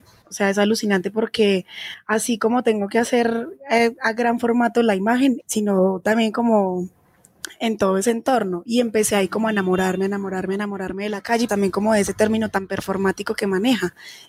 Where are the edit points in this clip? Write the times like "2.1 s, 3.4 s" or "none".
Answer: 5.4 s, 11.5 s